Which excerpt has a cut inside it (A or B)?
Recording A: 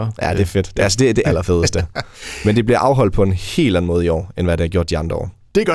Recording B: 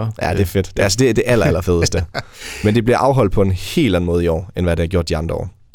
A